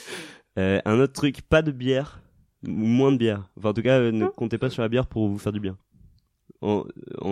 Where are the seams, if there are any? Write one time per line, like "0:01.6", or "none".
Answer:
none